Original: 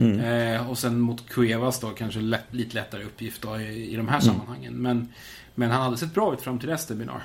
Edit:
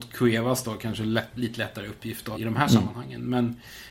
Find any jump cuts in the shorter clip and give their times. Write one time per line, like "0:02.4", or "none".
0:02.3

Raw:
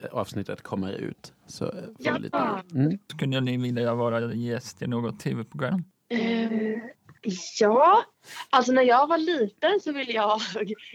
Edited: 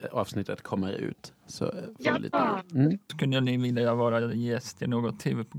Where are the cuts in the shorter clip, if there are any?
none

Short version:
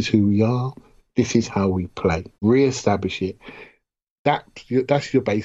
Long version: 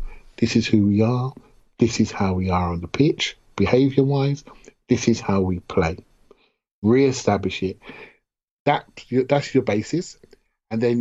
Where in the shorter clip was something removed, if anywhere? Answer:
0:01.0
0:02.3

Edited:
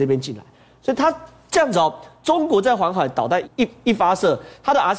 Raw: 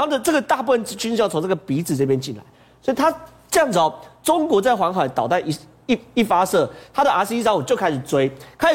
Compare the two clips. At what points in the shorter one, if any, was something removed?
0:03.4

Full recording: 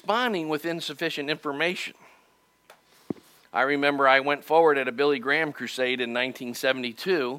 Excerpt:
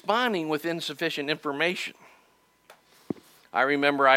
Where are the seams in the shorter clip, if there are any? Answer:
none

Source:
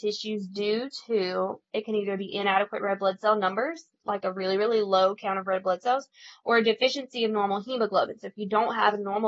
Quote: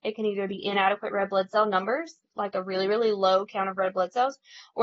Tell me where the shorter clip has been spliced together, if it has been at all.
none

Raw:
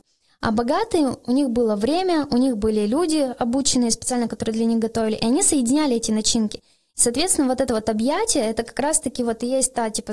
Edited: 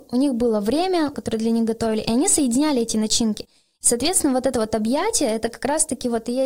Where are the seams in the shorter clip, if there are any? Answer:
0:01.1

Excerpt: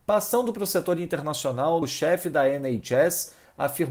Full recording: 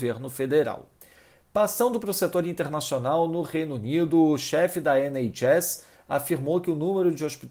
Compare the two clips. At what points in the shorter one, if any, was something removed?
0:01.8

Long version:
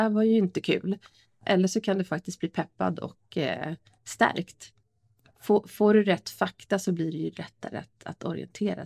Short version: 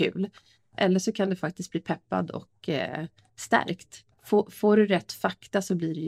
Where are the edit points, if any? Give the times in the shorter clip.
0:04.1

